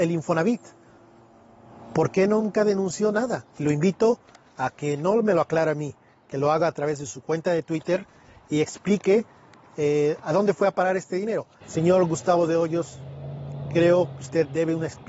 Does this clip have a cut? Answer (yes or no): yes